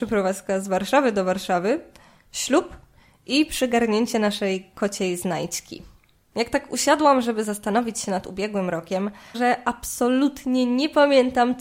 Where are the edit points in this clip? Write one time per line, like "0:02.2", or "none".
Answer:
0:06.3
0:09.3